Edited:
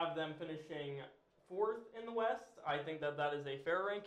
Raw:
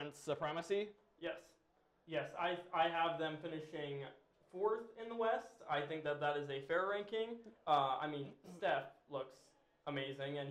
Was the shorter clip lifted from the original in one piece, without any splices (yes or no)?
yes